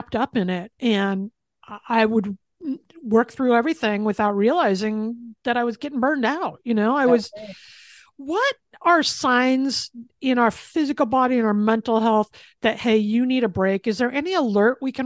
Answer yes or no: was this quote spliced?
no